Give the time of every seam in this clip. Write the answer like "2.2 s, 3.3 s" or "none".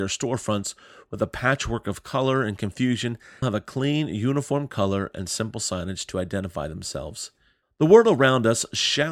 3.4 s, 7.6 s